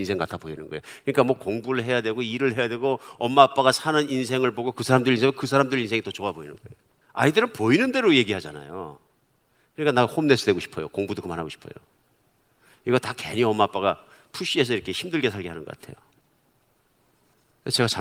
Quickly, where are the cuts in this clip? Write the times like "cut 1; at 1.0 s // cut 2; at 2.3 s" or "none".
cut 1; at 7.0 s